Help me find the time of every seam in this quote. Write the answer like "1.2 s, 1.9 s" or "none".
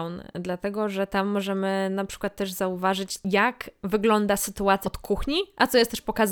4.8 s